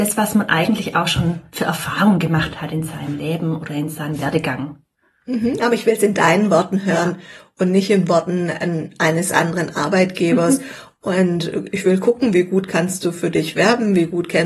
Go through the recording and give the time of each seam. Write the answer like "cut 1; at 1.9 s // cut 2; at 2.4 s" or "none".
none